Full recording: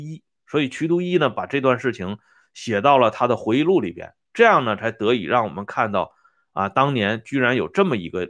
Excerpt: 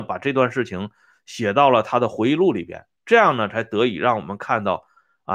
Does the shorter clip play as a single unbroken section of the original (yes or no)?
yes